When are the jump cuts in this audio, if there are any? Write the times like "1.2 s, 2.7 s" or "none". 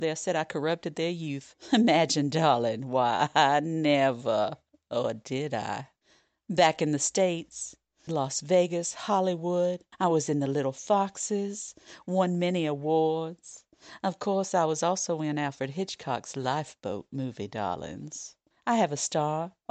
8.1 s